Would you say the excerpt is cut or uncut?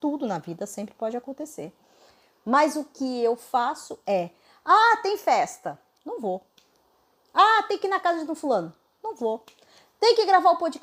uncut